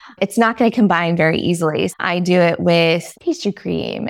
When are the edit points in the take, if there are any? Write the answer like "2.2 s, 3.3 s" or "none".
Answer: 1.9 s, 3.1 s

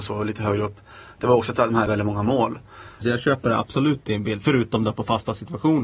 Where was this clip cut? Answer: 1.9 s, 3.0 s

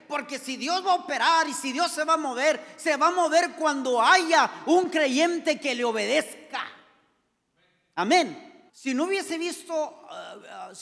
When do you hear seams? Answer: 8.7 s

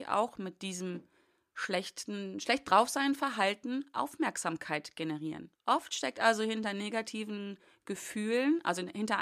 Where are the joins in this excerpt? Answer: 5.5 s

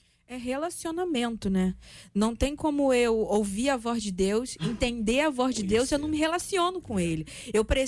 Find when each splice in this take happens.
none

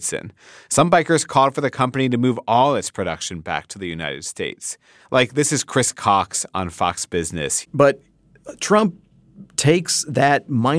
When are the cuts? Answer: 7.6 s

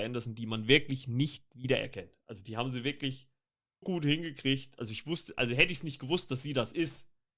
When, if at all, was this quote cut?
3.8 s

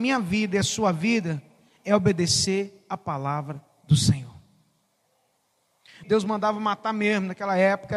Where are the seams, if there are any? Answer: 6.0 s

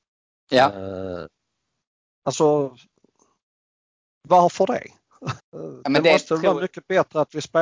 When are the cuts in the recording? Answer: 5.4 s

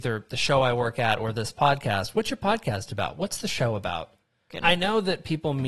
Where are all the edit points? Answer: 4.5 s

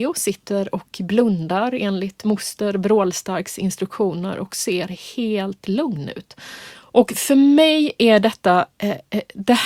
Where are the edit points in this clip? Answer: 6.7 s

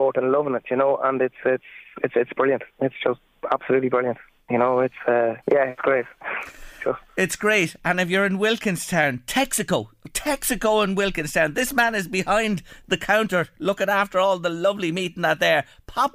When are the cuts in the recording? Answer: 5.4 s

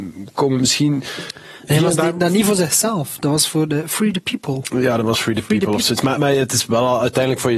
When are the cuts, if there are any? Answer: 6.2 s

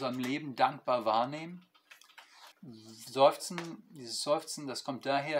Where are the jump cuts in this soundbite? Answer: 2.5 s

